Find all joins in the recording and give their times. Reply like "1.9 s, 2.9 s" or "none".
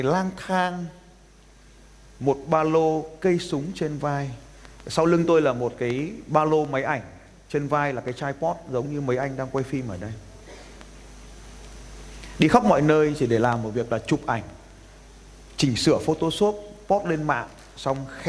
none

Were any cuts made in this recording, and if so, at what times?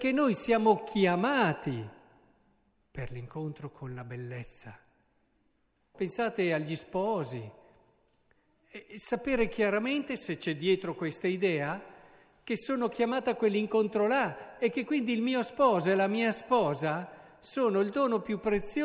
5.9 s

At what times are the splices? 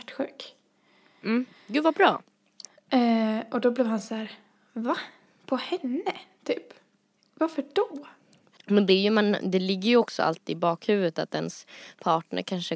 8.5 s

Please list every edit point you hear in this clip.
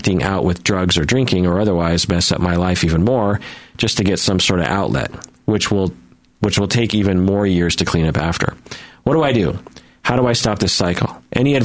none

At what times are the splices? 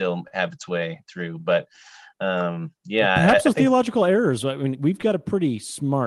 none

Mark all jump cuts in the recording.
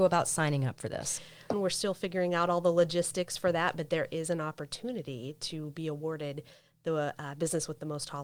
1.5 s

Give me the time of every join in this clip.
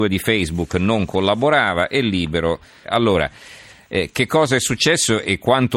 2.8 s

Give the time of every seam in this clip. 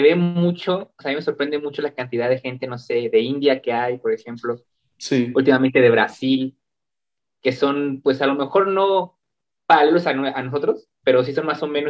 none

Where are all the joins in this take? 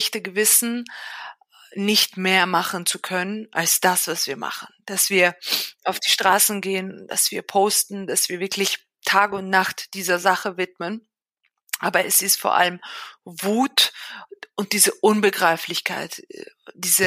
none

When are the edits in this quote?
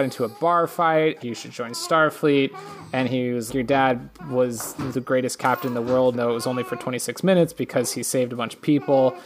1.2 s, 3.5 s, 6.1 s

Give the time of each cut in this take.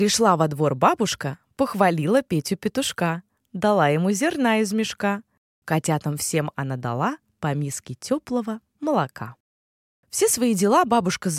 5.6 s

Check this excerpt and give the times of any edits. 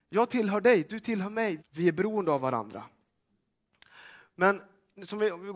1.6 s

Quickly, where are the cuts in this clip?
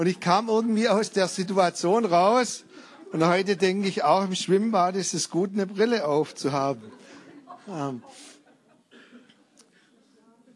none

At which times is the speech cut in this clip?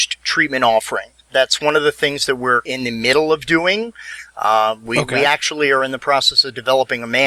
none

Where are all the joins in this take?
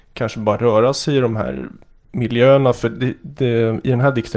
none

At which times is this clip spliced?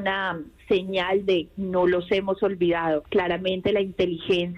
3.0 s

